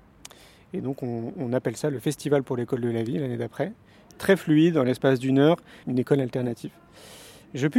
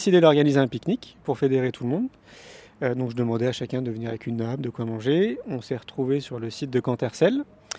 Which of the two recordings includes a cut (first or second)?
first